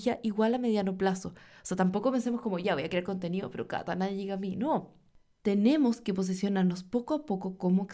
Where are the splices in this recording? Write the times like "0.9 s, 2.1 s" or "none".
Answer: none

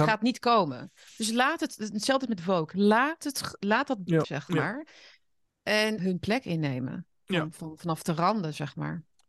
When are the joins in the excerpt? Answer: 4.2 s, 6.0 s

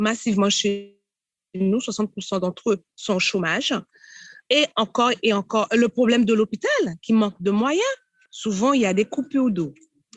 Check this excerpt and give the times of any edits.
8.3 s

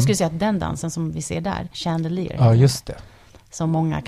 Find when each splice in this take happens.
1.7 s

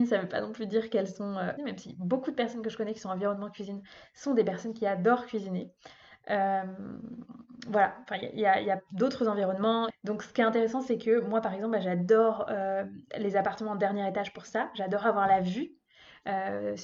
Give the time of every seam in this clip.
1.6 s, 9.9 s

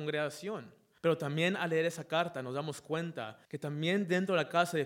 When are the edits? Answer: 1.0 s, 3.4 s

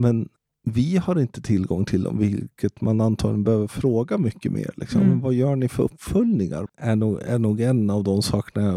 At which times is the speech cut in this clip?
6.7 s

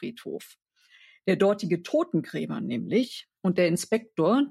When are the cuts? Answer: 3.4 s

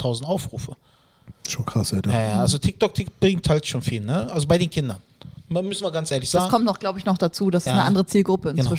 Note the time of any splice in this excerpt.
none

